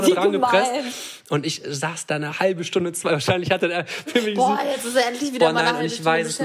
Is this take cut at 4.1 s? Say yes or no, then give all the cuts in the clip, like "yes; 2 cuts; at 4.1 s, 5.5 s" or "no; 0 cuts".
yes; 1 cut; at 4.1 s